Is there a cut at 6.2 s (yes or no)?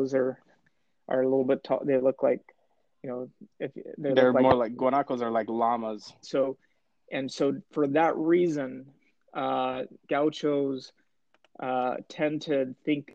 yes